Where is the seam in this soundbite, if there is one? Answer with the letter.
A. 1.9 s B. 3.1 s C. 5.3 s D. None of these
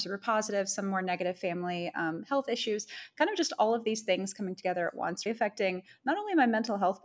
C